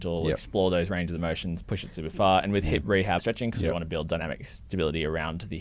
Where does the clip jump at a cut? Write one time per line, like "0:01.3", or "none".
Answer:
0:01.6
0:03.2